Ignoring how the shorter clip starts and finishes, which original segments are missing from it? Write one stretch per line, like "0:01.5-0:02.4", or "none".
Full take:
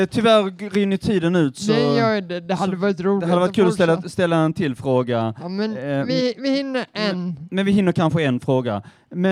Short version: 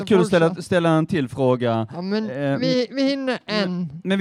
none